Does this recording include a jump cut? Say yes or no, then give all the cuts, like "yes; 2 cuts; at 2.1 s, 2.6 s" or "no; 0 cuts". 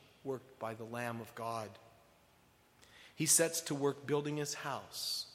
no; 0 cuts